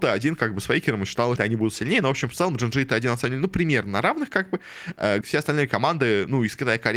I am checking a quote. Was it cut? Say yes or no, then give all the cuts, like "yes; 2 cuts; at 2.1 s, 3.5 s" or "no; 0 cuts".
yes; 2 cuts; at 1.4 s, 5.2 s